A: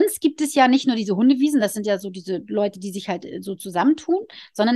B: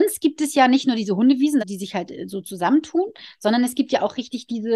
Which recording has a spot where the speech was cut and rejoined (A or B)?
B